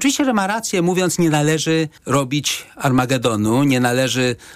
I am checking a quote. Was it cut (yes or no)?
yes